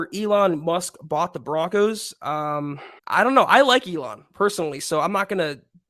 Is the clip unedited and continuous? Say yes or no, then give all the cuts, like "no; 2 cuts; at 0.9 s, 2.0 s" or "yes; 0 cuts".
no; 1 cut; at 3.0 s